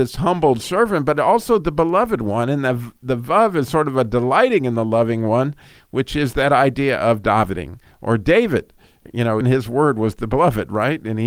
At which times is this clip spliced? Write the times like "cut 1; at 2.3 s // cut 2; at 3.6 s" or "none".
cut 1; at 9.4 s